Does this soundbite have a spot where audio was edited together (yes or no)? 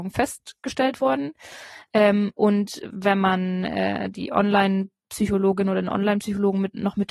no